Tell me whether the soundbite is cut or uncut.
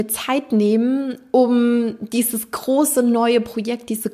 uncut